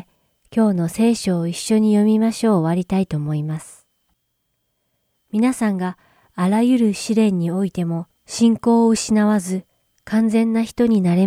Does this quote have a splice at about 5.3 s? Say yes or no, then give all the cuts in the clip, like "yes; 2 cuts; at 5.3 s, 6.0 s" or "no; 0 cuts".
yes; 1 cut; at 5.3 s